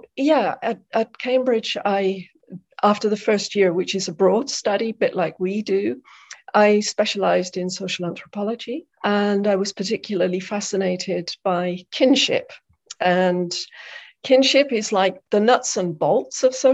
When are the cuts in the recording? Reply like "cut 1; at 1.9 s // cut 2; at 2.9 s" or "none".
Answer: cut 1; at 8.9 s // cut 2; at 15.2 s